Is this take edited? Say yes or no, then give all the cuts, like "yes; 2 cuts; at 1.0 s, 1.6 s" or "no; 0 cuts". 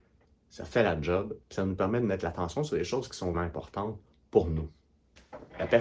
yes; 2 cuts; at 1.4 s, 3.3 s